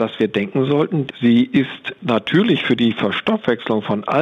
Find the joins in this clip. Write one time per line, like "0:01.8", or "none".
0:01.1